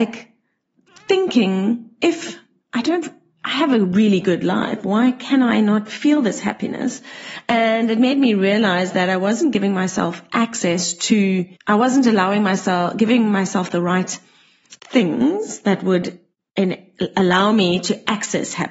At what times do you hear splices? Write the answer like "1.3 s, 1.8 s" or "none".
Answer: 11.6 s, 14.8 s